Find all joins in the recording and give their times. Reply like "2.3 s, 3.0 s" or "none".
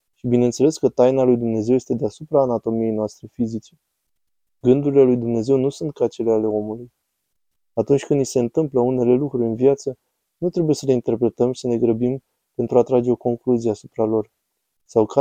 none